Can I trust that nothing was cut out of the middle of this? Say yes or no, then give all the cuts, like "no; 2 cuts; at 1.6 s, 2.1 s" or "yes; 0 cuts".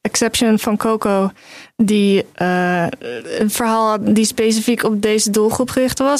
yes; 0 cuts